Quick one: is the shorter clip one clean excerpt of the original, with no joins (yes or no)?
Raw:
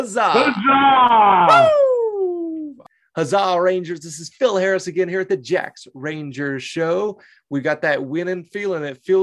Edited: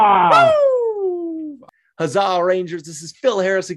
yes